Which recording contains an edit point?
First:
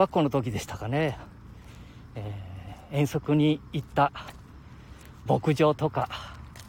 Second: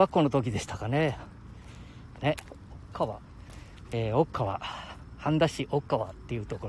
second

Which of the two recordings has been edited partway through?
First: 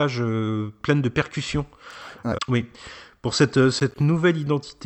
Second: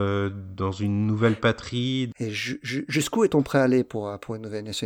first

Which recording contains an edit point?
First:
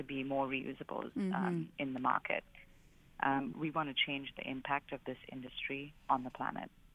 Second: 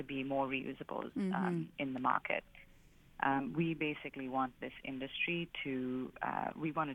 first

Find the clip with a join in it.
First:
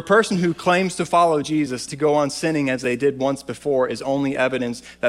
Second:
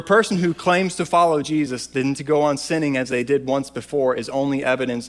first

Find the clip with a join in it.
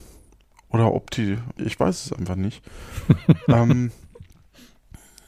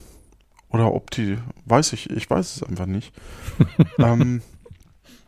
first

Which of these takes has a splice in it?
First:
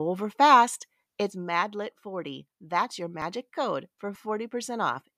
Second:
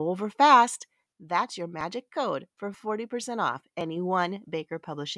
second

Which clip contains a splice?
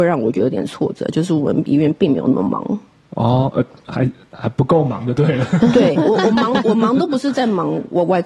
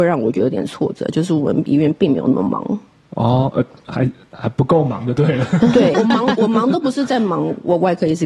second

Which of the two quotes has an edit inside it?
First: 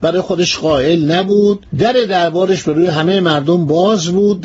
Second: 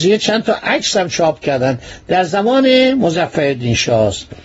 first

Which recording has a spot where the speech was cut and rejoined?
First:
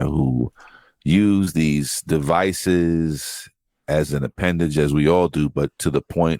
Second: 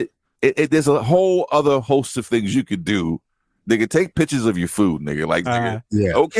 second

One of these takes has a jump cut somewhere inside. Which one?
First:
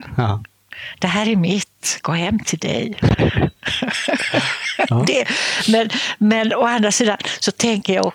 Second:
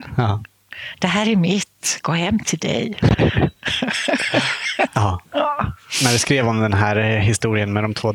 second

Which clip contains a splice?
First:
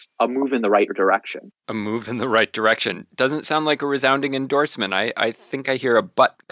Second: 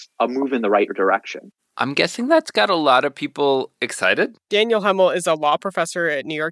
second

